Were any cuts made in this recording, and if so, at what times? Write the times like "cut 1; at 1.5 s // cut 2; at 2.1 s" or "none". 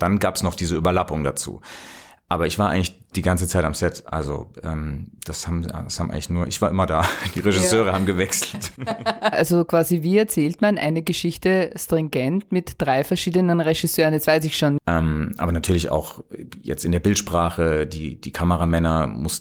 cut 1; at 9.3 s // cut 2; at 14.8 s

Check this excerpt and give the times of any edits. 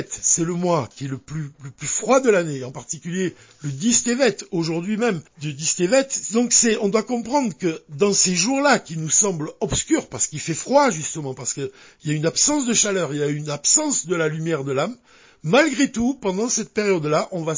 cut 1; at 5.3 s

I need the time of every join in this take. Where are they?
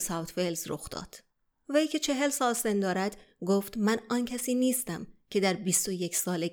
cut 1; at 1.5 s

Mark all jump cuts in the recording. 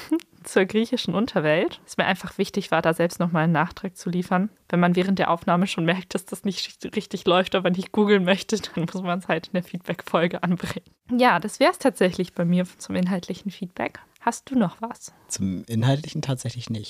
none

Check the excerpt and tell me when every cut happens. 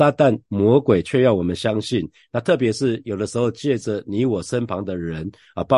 none

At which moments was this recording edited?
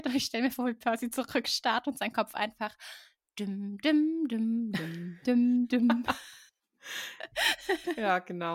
cut 1; at 5.7 s

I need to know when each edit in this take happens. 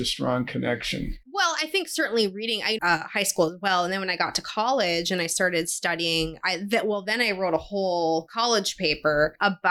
cut 1; at 2.8 s

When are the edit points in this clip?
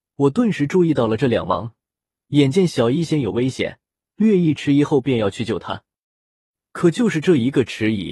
none

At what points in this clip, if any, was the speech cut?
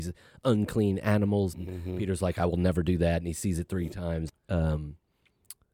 cut 1; at 1.5 s // cut 2; at 4.3 s

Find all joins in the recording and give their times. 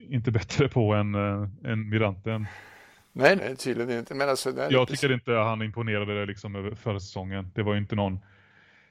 cut 1; at 3.4 s

